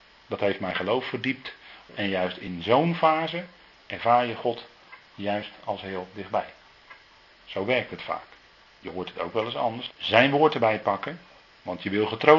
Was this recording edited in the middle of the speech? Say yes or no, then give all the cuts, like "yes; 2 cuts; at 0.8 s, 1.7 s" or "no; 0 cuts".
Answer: yes; 3 cuts; at 1.9 s, 8.8 s, 9.9 s